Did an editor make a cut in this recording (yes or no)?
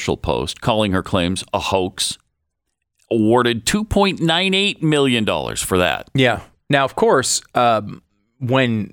no